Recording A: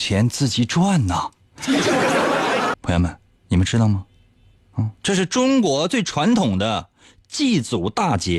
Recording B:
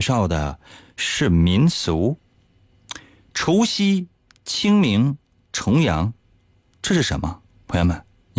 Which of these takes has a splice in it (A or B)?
A